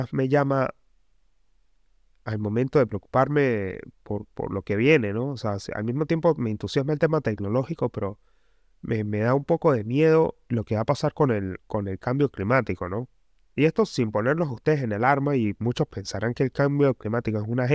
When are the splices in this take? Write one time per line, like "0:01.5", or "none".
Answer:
none